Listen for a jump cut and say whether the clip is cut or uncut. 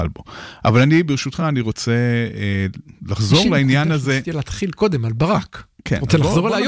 uncut